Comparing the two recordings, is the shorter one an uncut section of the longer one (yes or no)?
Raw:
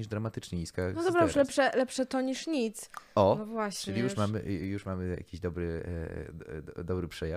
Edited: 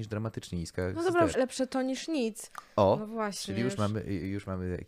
no